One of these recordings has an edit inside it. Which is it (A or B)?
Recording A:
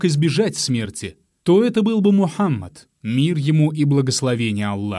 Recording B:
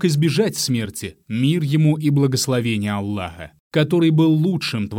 B